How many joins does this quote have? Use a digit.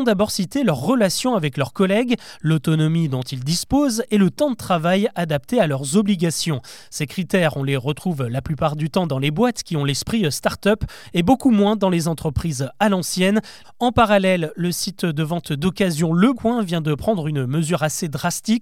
2